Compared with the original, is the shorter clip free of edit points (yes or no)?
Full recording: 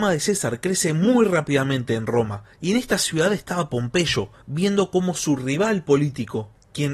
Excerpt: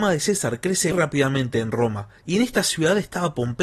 no